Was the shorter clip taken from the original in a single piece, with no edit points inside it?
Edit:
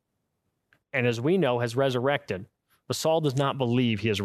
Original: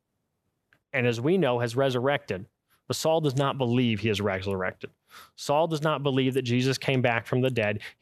yes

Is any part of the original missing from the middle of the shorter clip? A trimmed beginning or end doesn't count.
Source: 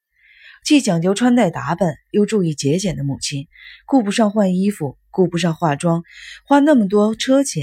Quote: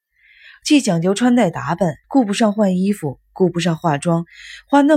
yes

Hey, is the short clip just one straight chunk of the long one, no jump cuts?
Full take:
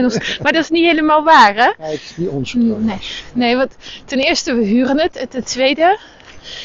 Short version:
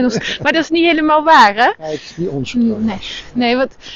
yes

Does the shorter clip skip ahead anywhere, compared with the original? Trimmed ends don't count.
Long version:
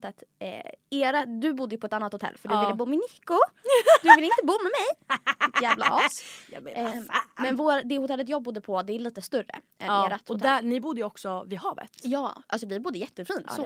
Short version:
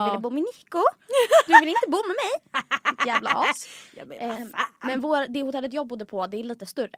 no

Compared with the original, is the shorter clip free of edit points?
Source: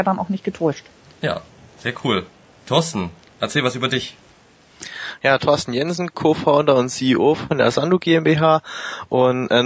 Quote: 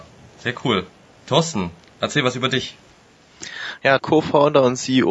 no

